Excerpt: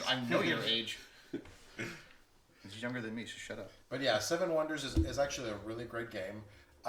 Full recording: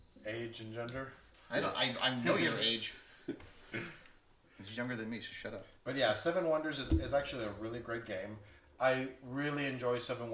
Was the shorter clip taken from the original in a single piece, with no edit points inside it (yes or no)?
yes